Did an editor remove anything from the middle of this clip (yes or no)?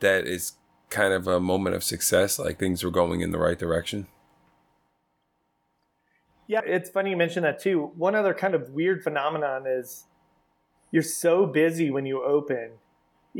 yes